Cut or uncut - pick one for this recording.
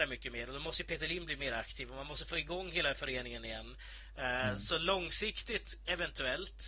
uncut